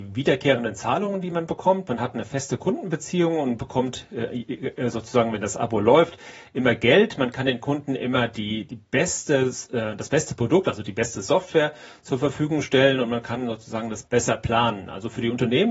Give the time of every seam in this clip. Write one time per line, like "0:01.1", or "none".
0:14.0